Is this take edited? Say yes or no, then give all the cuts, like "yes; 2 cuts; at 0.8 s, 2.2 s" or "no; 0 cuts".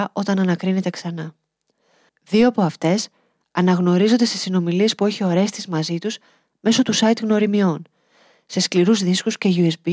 yes; 1 cut; at 2.1 s